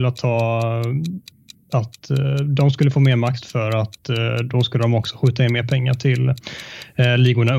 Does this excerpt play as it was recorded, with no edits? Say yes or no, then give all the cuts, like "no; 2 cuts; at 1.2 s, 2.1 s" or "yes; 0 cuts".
no; 1 cut; at 3.4 s